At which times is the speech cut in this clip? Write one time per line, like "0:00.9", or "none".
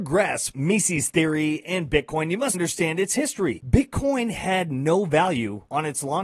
0:02.5